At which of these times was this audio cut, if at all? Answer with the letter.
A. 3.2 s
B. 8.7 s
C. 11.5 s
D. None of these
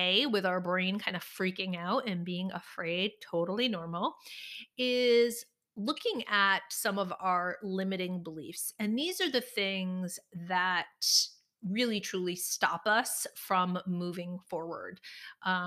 D